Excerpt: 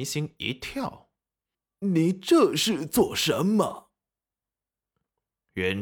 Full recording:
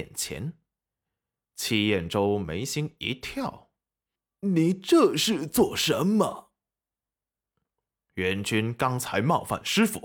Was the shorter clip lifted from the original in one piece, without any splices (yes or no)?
yes